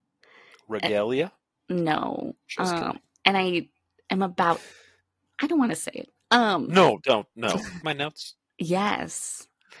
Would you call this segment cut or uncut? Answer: cut